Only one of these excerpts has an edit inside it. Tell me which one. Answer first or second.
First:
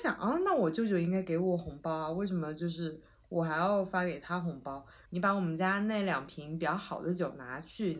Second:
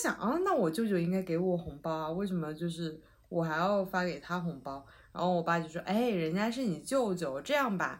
first